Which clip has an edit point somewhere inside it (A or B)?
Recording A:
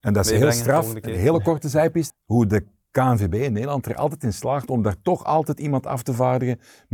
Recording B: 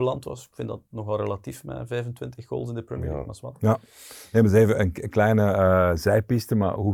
A